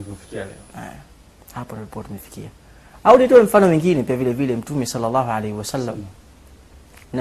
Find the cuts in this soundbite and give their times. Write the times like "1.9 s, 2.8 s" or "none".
none